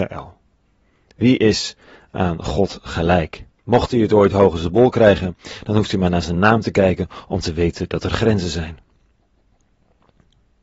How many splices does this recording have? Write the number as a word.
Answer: one